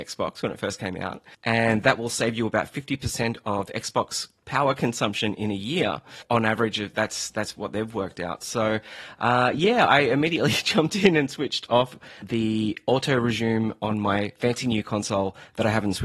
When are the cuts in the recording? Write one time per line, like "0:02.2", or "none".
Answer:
none